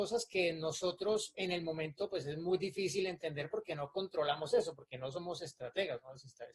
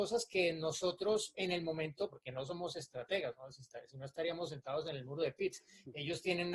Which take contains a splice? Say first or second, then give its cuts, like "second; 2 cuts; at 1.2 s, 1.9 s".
second; 1 cut; at 2.1 s